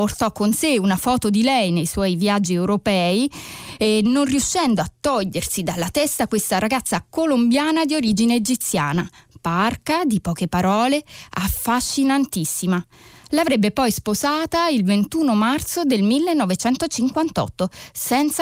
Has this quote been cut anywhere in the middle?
no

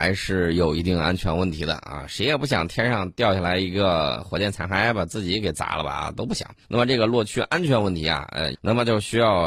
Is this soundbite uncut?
no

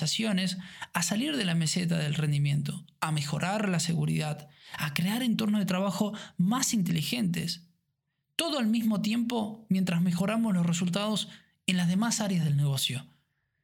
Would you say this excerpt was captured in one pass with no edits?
yes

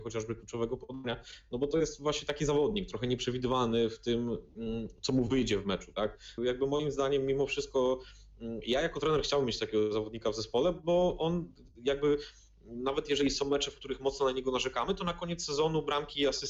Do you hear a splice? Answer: yes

